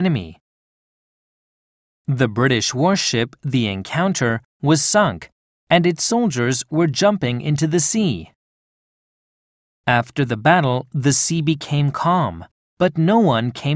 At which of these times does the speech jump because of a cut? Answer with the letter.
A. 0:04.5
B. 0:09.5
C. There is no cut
C